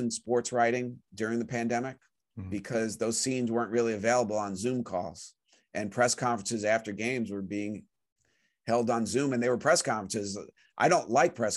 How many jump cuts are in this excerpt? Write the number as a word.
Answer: zero